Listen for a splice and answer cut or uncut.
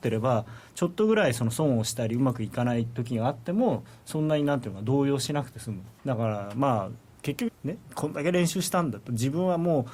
cut